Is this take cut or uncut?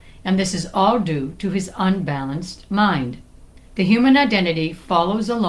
cut